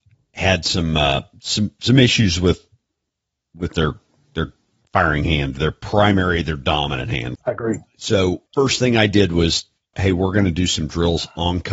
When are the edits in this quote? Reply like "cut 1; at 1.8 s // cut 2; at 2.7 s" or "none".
cut 1; at 7.4 s // cut 2; at 8.5 s // cut 3; at 9.9 s